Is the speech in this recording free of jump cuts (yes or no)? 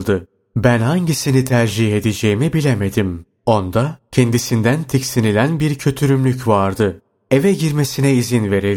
no